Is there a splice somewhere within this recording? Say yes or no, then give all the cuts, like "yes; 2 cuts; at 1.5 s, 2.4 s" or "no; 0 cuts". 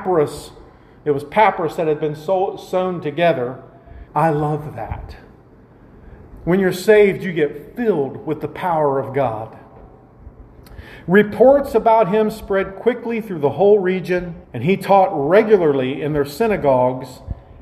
yes; 2 cuts; at 4.1 s, 14.4 s